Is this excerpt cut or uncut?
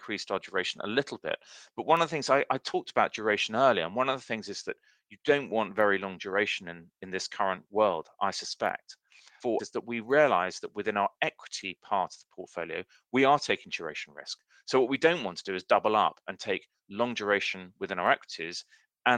cut